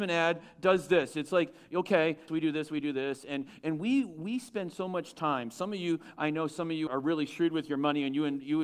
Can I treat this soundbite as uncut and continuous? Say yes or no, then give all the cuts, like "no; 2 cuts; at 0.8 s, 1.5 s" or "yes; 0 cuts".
no; 2 cuts; at 2.3 s, 6.9 s